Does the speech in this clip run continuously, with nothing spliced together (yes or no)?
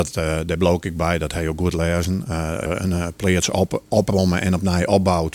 no